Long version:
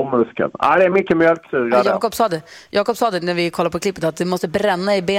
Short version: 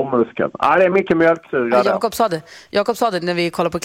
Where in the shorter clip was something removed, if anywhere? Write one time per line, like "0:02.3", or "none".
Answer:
none